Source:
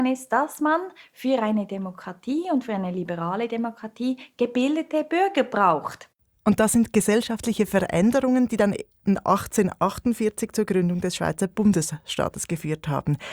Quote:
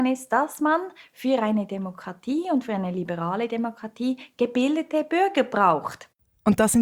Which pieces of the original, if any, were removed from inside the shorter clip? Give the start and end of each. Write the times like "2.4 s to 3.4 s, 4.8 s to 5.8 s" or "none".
none